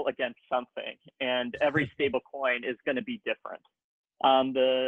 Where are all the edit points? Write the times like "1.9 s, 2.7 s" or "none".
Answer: none